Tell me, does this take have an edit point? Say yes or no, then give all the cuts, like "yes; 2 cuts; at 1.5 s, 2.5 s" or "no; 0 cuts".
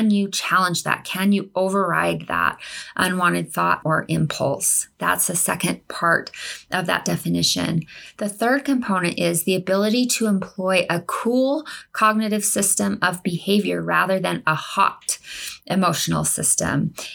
yes; 1 cut; at 3.8 s